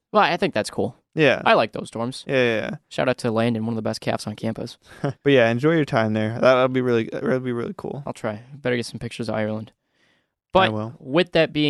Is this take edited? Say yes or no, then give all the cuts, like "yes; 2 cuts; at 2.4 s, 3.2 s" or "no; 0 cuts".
yes; 1 cut; at 5.2 s